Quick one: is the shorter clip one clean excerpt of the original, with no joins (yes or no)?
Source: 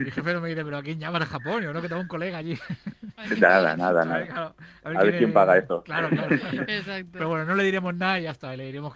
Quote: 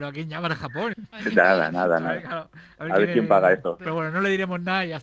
no